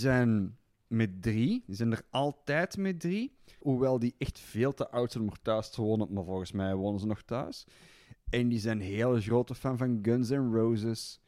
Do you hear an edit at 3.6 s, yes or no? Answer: yes